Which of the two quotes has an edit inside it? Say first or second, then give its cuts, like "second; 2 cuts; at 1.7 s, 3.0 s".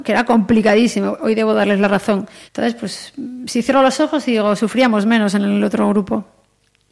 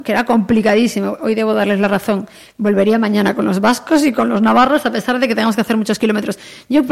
first; 1 cut; at 2.5 s